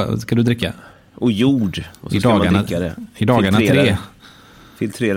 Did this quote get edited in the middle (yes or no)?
no